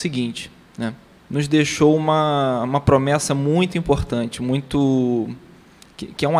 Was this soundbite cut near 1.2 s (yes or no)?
yes